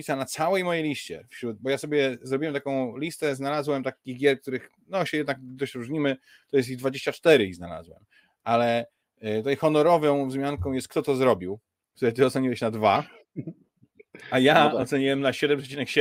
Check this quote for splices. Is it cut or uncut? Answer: uncut